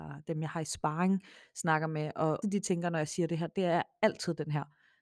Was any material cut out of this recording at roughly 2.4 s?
yes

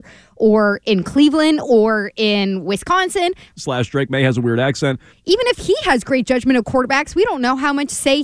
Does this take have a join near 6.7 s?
no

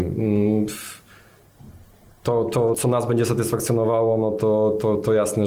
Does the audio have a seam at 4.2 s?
no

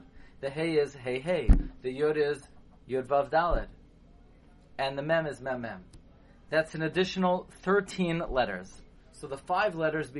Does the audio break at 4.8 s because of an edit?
no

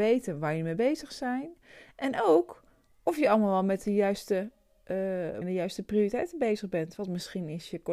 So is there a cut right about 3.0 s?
no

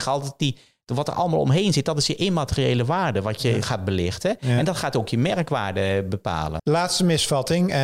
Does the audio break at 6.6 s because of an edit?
yes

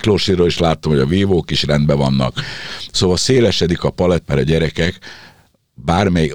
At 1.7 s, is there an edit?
no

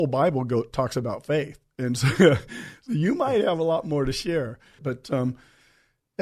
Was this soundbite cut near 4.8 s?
yes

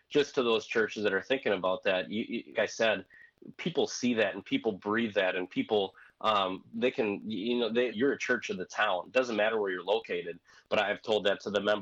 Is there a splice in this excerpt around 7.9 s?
yes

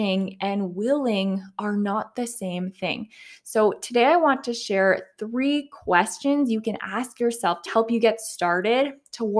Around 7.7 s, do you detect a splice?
yes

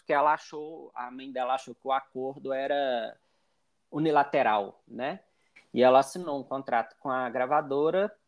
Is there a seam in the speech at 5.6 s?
yes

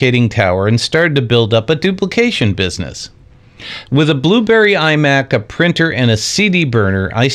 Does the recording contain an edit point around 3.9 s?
yes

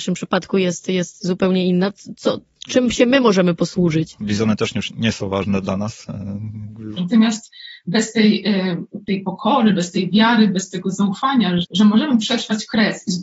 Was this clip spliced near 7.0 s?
yes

